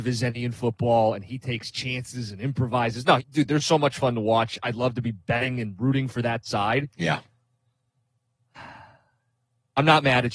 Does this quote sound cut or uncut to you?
cut